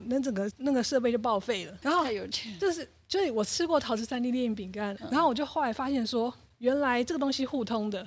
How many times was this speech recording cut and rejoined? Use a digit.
2